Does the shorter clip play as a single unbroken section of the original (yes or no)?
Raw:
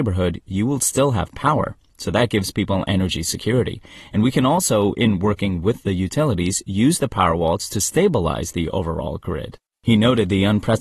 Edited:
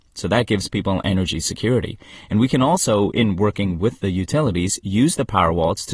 yes